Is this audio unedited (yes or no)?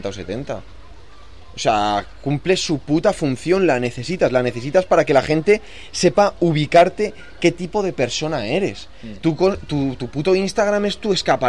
yes